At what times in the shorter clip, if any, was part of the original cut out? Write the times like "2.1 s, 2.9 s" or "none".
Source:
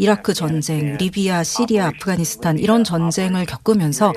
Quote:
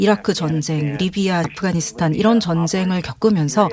1.4 s